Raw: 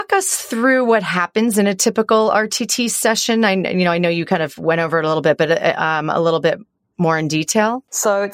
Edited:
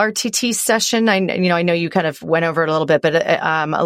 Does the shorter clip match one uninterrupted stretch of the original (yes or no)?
yes